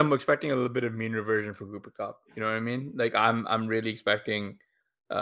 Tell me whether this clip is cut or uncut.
uncut